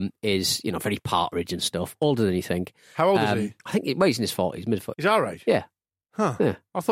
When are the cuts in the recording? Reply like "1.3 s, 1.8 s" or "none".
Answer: 3.6 s, 4.9 s

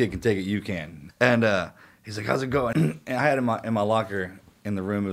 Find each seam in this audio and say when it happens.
1.1 s, 2.7 s

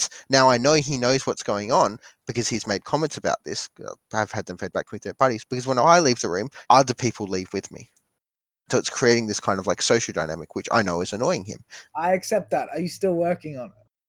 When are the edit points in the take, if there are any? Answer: 6.6 s, 11.9 s

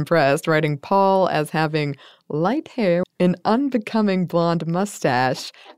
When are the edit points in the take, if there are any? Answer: 3.0 s

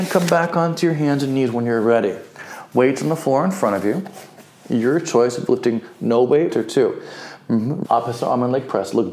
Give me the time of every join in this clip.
6.5 s, 7.8 s

